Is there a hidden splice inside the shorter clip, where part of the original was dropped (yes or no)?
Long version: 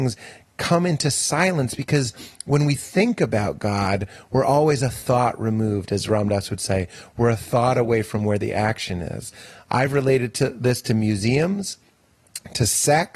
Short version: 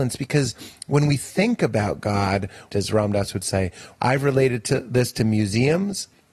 yes